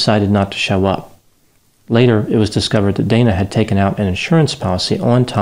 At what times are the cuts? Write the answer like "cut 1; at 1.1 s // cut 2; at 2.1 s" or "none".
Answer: none